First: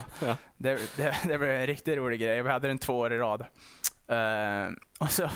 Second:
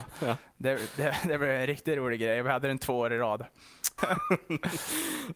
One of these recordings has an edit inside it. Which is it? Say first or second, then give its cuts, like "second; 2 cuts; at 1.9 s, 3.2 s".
second; 1 cut; at 4.0 s